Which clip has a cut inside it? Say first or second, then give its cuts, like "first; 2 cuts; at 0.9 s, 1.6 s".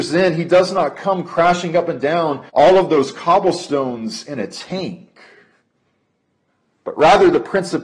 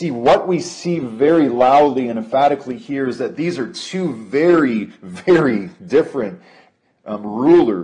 first; 1 cut; at 2.5 s